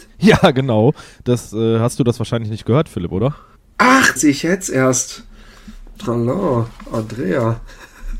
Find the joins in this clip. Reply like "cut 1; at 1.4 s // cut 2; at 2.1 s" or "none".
cut 1; at 4.2 s